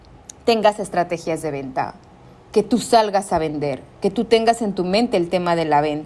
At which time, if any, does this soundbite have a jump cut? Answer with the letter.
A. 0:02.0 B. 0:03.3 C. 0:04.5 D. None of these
D